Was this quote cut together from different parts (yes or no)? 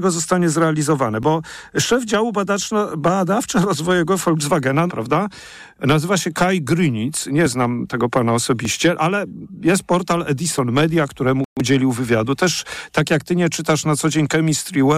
yes